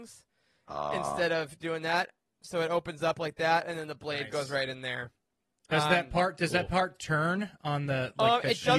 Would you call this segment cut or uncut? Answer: uncut